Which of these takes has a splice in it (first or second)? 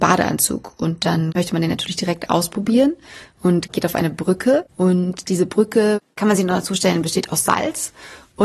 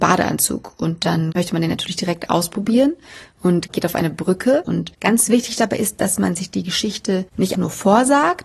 second